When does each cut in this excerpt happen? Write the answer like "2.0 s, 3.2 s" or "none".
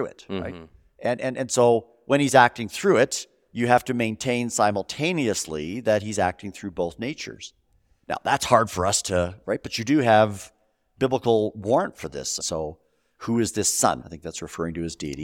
9.4 s, 12.4 s, 14.0 s